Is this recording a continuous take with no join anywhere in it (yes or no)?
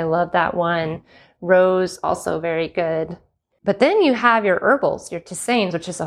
no